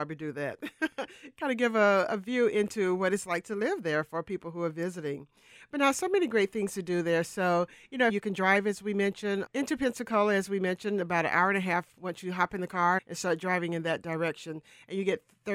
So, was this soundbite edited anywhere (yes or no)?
yes